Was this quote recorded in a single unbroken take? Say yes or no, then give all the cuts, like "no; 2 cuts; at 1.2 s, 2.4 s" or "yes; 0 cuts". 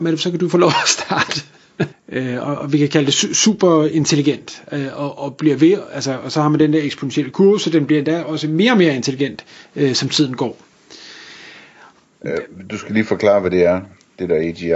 no; 2 cuts; at 1.9 s, 12.1 s